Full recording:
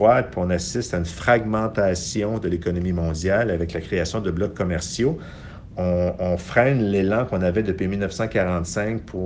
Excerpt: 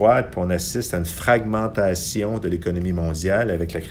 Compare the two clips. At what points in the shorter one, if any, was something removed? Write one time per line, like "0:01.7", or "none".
none